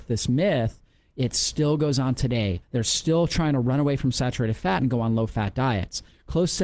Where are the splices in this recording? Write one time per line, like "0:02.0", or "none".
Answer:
0:02.6